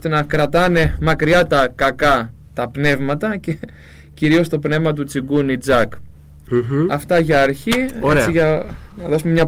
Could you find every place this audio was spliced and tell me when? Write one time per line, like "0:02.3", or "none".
none